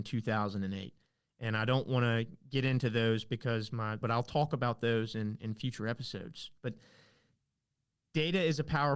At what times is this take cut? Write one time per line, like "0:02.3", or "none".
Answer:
0:04.0
0:06.6